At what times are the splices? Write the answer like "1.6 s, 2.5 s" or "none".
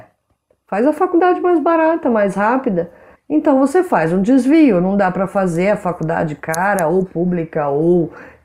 3.2 s